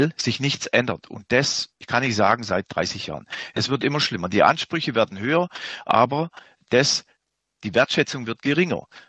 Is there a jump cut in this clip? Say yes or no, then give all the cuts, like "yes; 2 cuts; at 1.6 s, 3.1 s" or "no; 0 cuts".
no; 0 cuts